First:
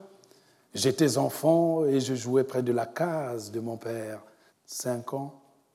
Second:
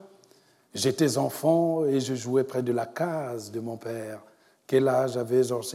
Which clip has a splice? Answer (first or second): first